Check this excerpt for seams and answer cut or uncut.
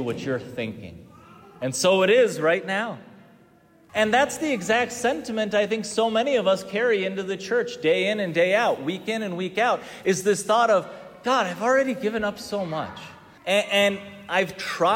cut